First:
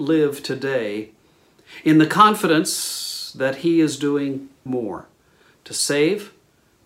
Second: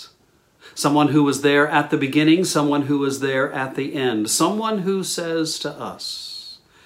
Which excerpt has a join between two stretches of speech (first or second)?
first